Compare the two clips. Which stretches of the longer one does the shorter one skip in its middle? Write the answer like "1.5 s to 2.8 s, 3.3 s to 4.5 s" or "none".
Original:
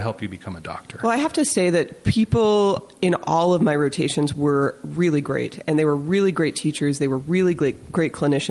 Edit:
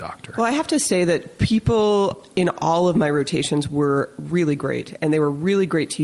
none